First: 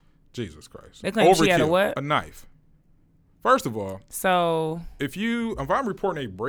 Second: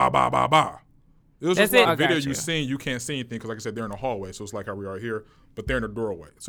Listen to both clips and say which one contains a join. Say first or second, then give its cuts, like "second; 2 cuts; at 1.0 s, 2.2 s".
second; 1 cut; at 1.8 s